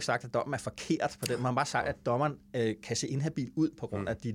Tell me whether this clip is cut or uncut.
uncut